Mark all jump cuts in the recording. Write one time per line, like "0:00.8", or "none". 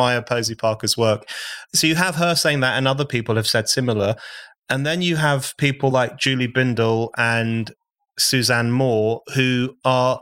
none